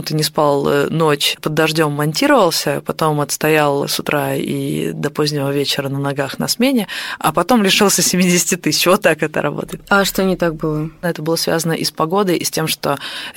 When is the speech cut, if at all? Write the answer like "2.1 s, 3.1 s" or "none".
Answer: 11.0 s